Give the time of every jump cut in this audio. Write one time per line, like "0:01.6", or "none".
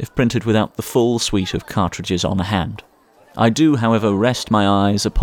0:03.2